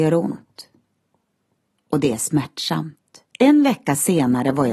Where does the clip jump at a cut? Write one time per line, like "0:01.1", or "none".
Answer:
0:03.3